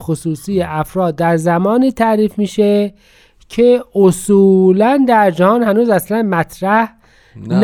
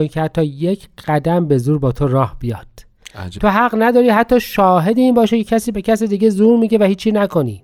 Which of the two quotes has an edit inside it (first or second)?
second